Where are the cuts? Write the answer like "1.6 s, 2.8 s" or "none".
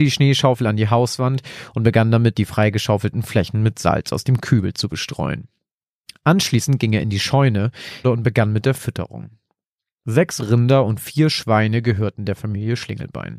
8.0 s